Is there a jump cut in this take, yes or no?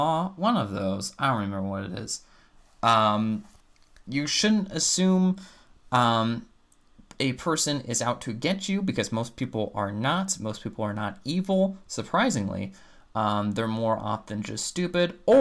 no